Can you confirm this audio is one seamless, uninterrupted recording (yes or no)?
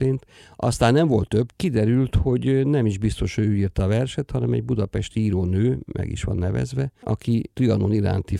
no